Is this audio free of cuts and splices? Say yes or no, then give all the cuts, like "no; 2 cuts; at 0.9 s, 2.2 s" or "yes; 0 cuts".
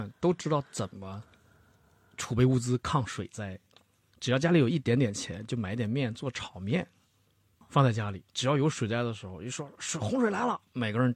yes; 0 cuts